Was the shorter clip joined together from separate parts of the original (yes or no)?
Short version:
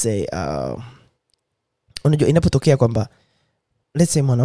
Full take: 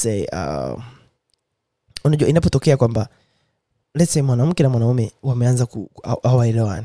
no